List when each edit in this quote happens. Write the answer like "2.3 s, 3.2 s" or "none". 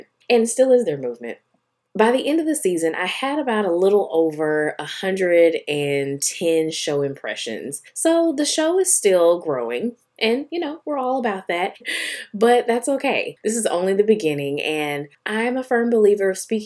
11.8 s